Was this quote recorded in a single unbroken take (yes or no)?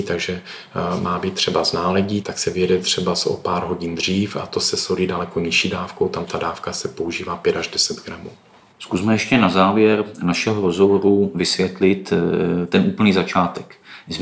yes